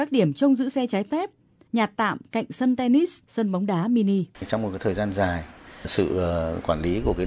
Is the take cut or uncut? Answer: cut